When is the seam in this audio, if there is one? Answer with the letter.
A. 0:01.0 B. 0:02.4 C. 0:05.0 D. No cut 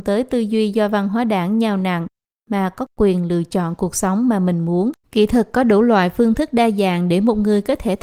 C